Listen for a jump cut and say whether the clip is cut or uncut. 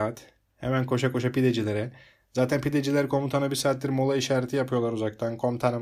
uncut